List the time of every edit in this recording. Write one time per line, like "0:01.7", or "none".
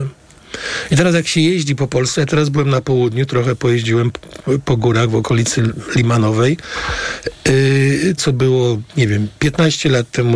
0:08.2